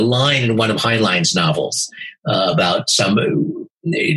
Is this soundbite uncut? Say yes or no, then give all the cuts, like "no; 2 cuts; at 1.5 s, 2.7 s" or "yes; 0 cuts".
yes; 0 cuts